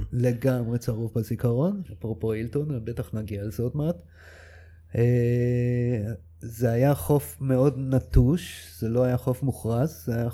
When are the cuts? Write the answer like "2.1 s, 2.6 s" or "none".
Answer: 1.9 s

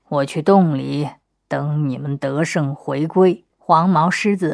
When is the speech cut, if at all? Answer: 3.5 s

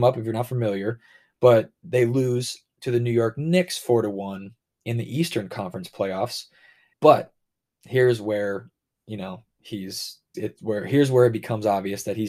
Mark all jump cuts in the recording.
6.9 s, 10.3 s

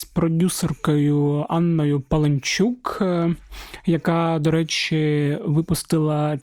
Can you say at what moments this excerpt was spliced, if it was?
none

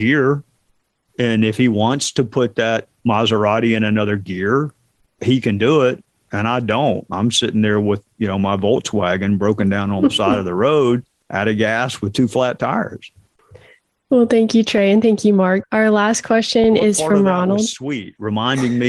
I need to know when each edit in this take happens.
15.6 s

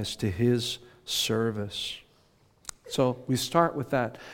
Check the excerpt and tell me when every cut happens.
none

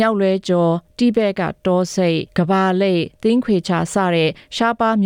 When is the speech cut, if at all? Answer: 2.3 s

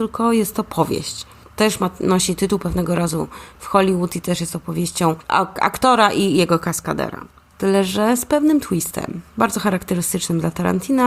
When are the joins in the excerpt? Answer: 7.5 s

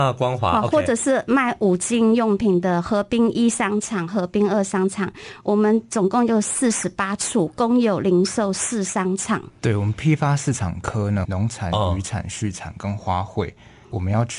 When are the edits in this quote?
9.6 s, 11.2 s

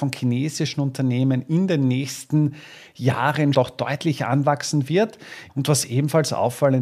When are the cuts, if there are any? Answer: 3.5 s, 5.5 s

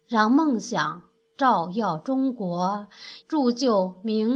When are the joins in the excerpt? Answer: 3.2 s

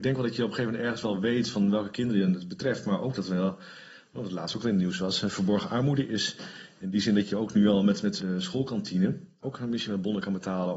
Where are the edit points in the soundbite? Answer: 8.2 s, 9.4 s

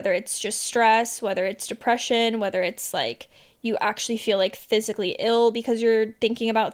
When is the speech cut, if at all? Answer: none

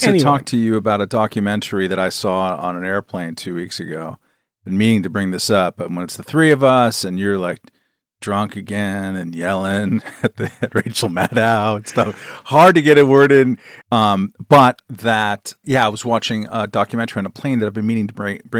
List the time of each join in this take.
13.8 s, 15.6 s

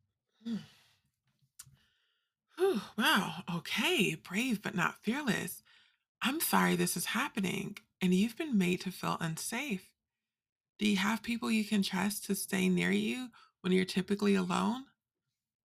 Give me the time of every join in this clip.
none

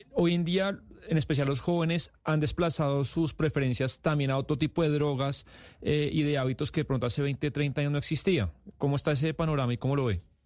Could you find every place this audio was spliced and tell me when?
none

